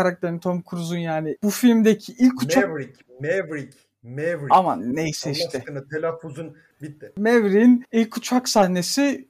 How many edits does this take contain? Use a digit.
1